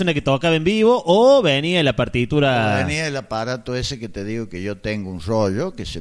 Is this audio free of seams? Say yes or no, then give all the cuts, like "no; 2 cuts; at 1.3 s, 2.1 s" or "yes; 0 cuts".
yes; 0 cuts